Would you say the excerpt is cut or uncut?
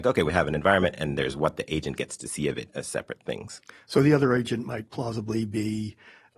uncut